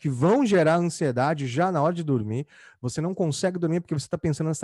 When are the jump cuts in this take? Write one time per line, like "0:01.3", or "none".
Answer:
none